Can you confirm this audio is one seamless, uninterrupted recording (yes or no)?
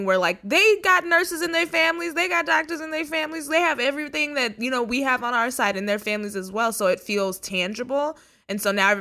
yes